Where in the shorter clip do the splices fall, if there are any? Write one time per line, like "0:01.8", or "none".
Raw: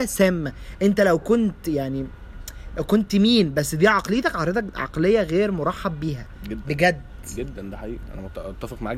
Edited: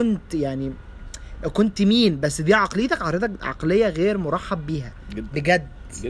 none